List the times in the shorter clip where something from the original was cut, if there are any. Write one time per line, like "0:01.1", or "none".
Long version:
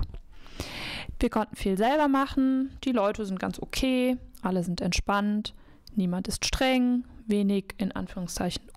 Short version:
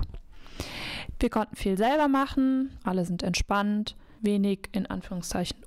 0:02.8
0:04.2